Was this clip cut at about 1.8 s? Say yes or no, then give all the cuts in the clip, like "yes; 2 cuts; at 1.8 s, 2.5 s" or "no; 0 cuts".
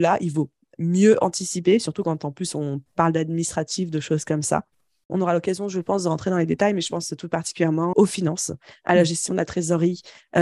no; 2 cuts; at 5.1 s, 7.9 s